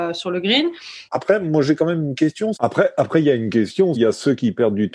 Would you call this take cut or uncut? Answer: cut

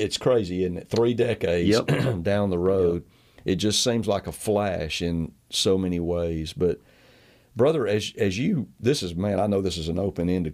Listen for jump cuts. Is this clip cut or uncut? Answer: uncut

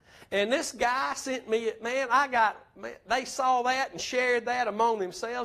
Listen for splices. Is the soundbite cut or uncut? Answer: uncut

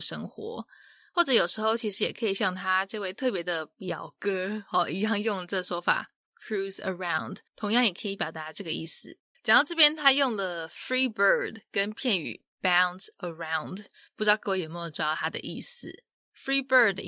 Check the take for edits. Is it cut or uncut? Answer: cut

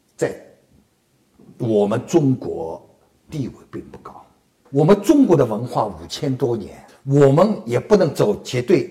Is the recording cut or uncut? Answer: cut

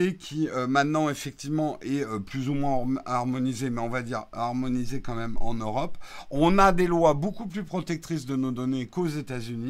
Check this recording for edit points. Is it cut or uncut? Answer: uncut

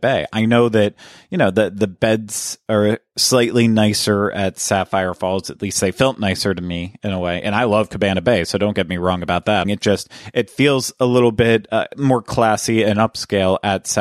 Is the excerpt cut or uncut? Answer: cut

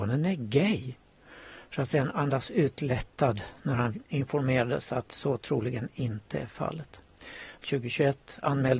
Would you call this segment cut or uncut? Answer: cut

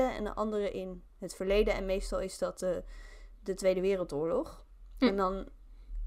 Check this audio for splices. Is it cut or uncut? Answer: uncut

